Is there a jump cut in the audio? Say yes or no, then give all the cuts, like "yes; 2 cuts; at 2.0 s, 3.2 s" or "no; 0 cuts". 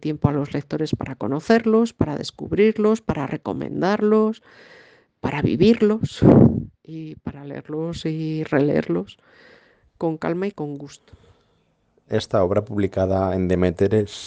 no; 0 cuts